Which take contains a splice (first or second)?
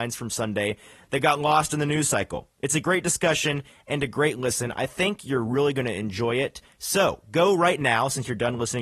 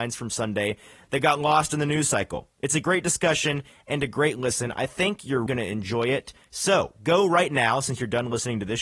second